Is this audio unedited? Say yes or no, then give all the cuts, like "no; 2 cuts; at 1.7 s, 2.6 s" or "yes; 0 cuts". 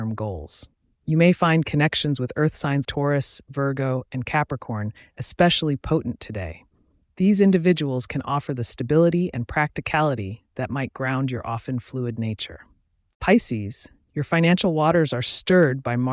no; 1 cut; at 2.8 s